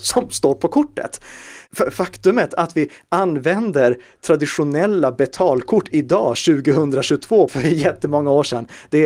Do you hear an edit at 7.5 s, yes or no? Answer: yes